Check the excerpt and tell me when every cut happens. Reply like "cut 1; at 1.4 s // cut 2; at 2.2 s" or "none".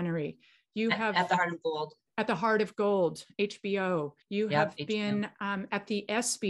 cut 1; at 4.2 s